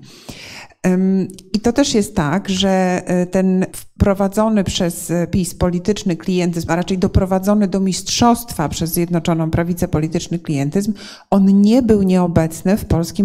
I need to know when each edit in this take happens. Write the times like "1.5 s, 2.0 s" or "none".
3.7 s